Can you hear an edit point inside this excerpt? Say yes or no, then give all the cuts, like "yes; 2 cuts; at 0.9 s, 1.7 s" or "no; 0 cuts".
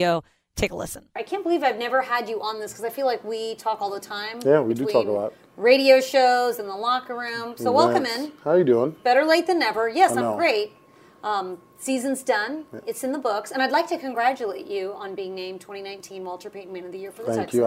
no; 0 cuts